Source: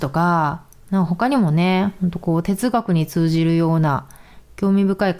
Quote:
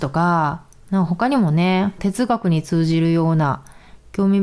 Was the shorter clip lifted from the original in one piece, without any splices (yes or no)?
no